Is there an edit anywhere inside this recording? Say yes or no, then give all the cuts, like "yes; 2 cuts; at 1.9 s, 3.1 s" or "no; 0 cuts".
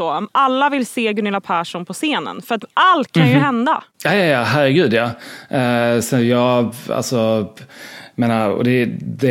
yes; 1 cut; at 3.9 s